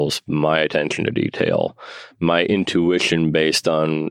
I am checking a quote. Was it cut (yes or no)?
no